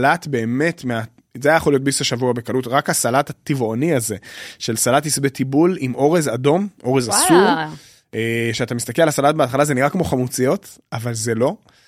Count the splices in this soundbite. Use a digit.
0